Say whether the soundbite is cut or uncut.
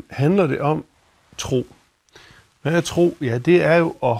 uncut